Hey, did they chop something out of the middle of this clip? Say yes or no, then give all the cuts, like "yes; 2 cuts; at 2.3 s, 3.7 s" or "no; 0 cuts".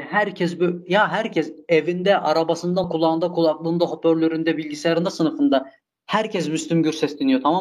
yes; 1 cut; at 2.8 s